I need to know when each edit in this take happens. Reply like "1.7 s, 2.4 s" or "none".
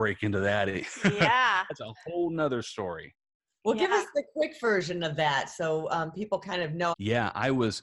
6.9 s

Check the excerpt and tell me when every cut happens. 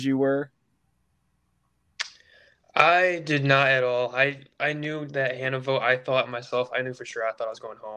none

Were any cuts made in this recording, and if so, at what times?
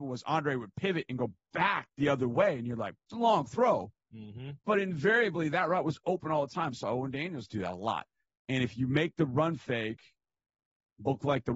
3.0 s, 4.6 s, 8.4 s

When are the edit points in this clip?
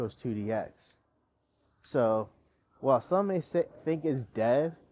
none

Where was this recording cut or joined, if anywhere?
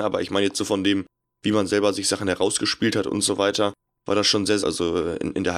4.6 s

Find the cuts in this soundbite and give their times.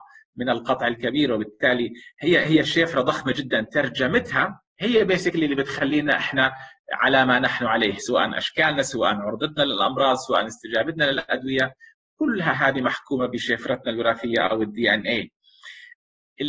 4.7 s

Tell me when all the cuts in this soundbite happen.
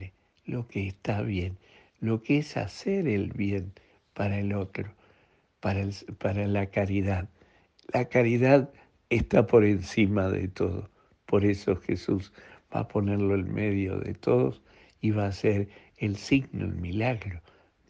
none

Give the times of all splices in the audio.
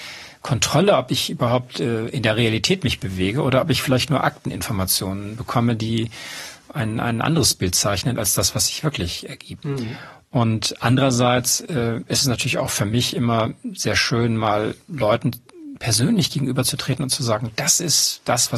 9.6 s

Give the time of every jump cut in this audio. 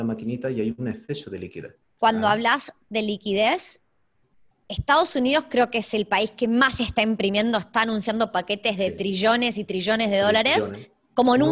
2.0 s

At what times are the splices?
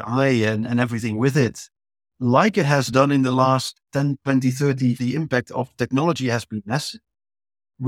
5.0 s

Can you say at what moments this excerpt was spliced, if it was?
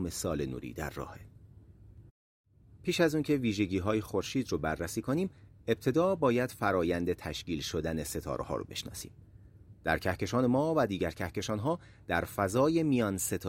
none

